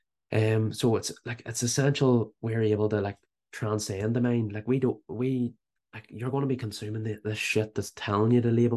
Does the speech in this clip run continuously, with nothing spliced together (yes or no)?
yes